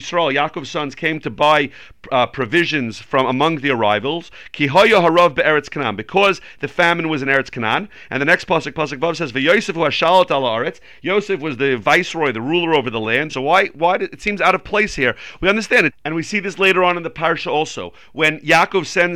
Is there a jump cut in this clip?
yes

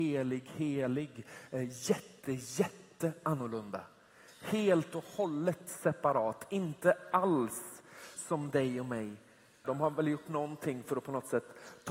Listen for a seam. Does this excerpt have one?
yes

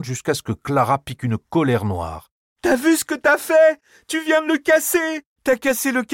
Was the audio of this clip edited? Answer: no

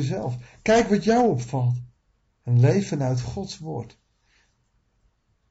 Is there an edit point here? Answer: no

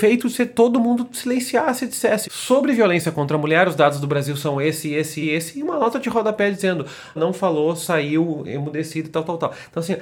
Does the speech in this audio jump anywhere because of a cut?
yes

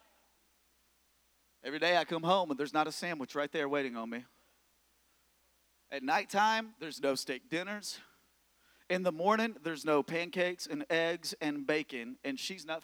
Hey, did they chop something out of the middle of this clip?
no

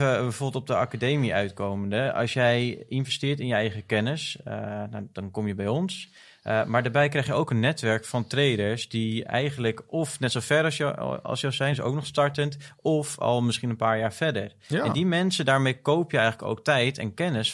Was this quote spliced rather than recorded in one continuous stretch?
no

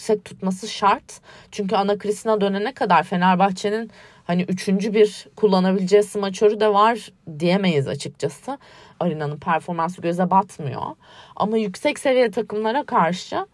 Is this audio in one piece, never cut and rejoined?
no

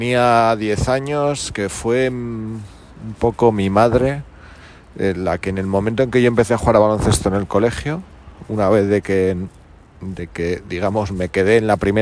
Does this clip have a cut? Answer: no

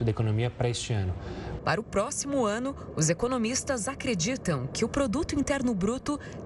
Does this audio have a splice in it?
yes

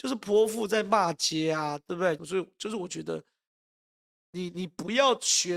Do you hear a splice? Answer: yes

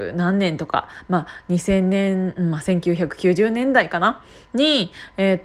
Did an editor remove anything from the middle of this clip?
no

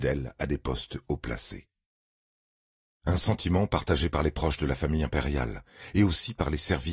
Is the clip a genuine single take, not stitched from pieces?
yes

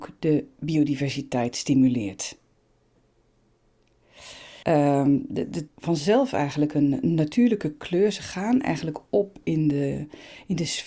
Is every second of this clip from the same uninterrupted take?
no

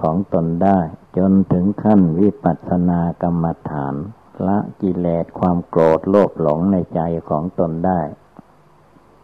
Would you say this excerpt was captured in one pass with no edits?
no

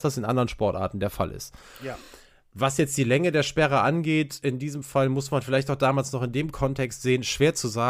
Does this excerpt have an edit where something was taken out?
no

